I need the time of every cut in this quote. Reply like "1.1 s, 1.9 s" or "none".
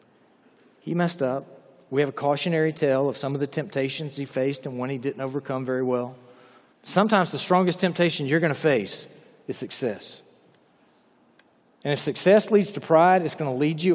6.7 s